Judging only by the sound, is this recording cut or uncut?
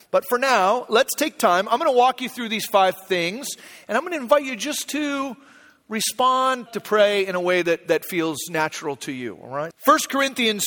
cut